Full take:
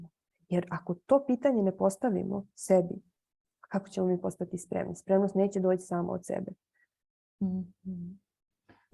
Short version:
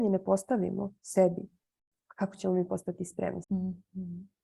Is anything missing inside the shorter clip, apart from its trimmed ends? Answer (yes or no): yes